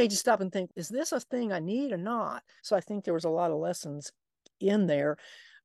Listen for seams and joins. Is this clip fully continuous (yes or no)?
no